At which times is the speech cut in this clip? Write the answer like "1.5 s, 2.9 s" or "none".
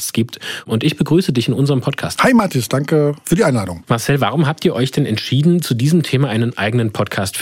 2.1 s